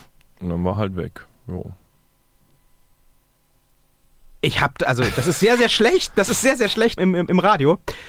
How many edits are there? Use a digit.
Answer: 1